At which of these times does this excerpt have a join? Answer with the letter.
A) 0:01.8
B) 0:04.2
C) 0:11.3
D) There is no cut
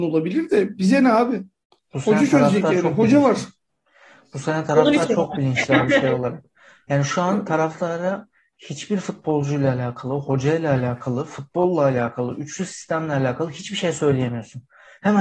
A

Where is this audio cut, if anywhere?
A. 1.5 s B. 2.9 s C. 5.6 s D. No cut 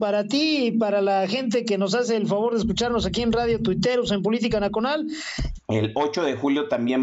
C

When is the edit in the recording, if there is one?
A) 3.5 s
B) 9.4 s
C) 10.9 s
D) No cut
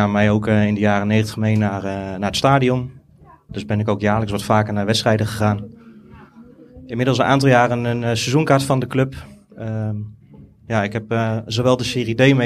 A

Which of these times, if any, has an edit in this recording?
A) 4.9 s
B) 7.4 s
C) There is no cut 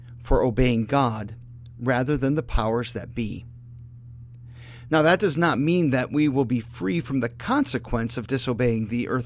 A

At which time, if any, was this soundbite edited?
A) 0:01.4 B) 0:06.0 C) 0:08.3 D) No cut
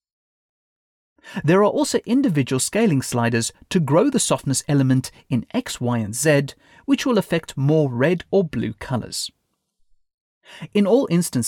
C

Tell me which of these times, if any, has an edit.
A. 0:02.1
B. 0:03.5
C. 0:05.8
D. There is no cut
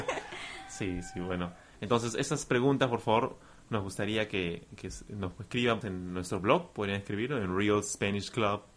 C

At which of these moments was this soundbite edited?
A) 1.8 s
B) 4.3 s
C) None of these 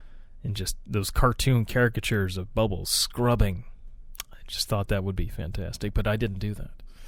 C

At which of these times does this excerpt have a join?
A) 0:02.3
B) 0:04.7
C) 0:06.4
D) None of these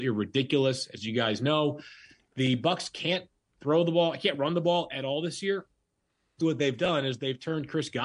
C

